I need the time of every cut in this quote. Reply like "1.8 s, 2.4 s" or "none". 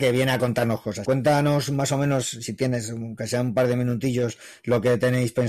1.0 s

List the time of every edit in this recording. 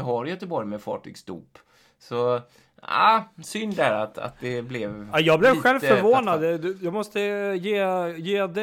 none

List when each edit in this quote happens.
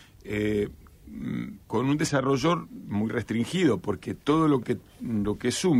none

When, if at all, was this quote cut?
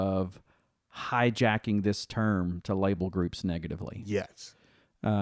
none

